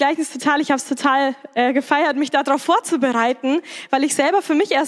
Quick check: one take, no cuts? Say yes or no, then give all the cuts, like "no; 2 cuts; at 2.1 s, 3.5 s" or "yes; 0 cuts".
yes; 0 cuts